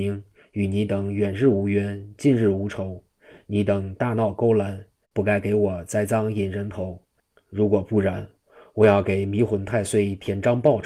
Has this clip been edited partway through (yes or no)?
yes